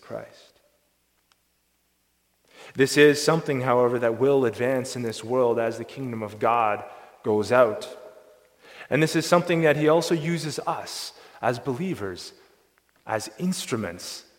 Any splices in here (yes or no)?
no